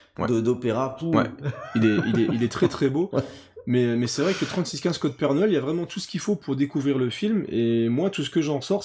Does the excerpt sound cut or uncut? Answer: uncut